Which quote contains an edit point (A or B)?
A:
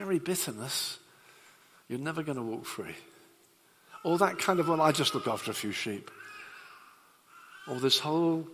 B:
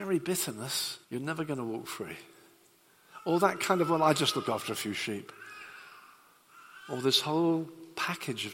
B